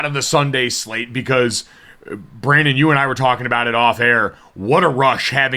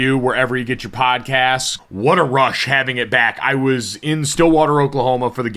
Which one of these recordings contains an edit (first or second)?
second